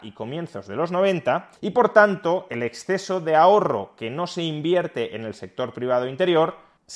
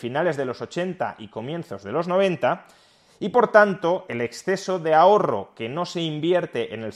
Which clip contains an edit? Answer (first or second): first